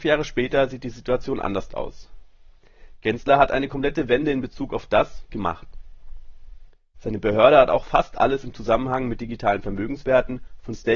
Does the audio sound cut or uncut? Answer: cut